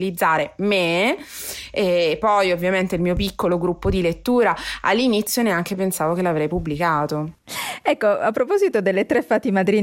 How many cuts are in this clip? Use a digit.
0